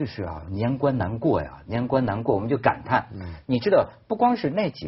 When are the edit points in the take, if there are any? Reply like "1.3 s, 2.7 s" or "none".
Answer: 3.4 s